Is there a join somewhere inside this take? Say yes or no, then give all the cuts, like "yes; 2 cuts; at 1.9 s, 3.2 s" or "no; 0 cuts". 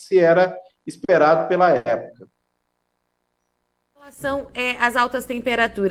no; 0 cuts